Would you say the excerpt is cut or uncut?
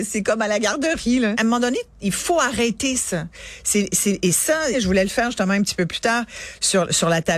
cut